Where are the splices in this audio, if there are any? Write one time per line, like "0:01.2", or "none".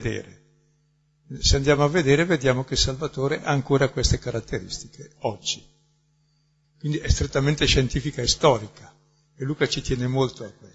0:06.6